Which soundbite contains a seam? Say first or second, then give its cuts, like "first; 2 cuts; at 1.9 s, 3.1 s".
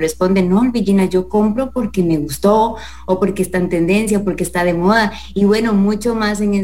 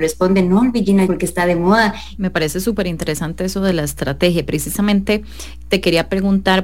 second; 2 cuts; at 1.1 s, 2.1 s